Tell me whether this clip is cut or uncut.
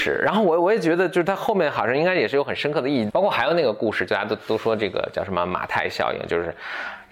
cut